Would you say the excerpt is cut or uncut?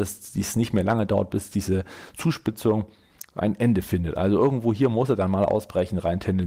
uncut